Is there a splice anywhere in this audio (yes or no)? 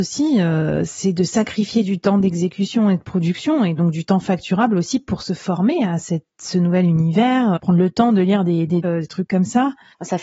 yes